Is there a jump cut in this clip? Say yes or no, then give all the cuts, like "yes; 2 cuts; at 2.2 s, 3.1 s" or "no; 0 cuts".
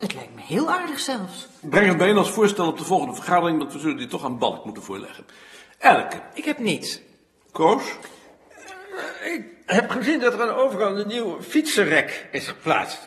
yes; 1 cut; at 1.6 s